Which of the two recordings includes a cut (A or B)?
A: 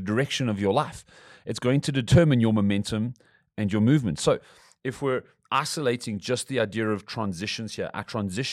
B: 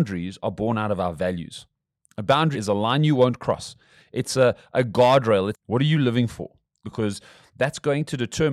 B